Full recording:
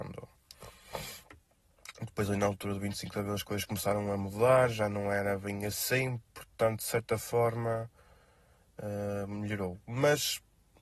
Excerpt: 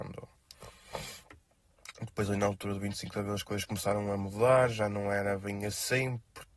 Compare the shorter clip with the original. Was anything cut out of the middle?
no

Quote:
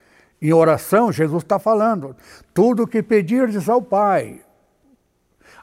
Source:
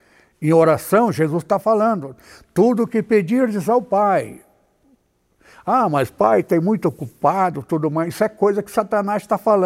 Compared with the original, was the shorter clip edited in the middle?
no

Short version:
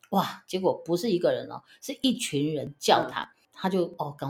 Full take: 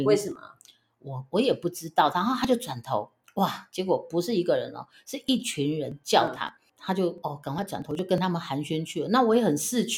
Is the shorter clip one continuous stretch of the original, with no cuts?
yes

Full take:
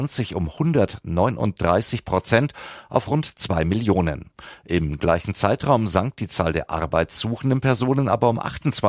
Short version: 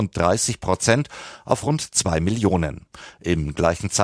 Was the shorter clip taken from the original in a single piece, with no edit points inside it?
yes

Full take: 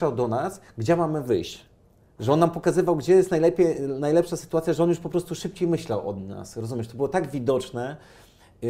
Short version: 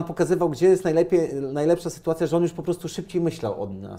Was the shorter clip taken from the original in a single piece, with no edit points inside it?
yes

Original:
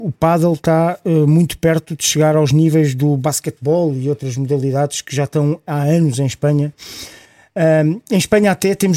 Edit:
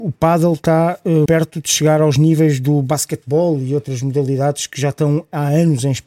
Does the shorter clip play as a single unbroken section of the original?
no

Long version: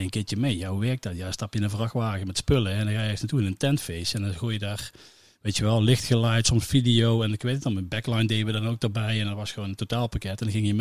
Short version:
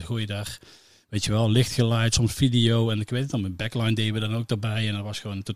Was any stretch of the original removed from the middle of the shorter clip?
no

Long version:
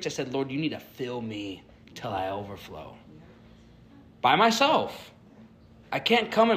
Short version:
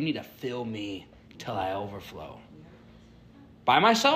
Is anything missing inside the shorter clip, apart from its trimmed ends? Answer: no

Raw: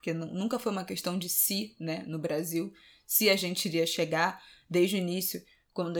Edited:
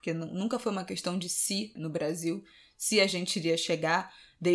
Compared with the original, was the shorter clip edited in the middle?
yes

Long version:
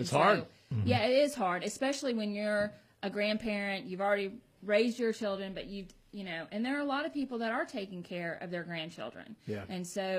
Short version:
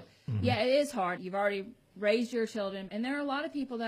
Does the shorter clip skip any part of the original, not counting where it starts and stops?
yes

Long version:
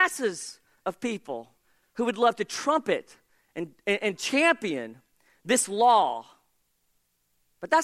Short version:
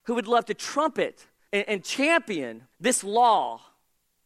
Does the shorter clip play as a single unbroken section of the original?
no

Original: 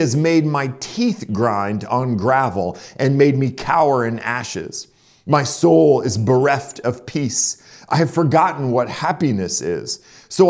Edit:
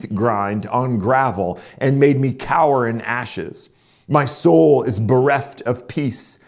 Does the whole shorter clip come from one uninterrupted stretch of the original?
yes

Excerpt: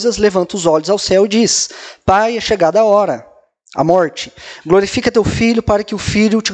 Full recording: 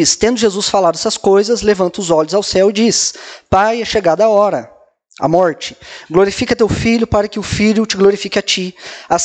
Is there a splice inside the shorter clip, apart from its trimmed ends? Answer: no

